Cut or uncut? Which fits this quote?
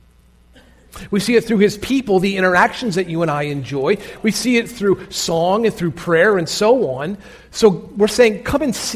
uncut